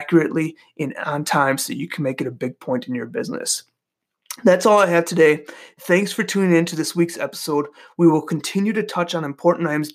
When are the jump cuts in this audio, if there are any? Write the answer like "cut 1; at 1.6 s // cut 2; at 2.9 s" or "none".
none